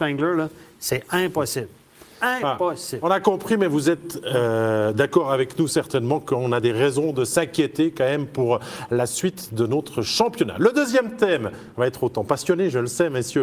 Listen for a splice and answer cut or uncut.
uncut